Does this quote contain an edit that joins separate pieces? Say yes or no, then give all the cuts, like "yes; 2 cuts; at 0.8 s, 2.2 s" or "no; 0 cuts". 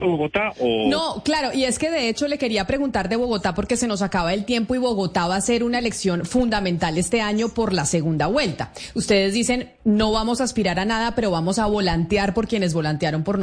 no; 0 cuts